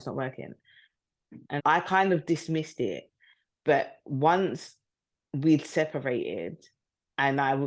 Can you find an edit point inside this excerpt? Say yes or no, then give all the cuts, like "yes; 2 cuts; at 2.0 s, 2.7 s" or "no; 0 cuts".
yes; 1 cut; at 1.6 s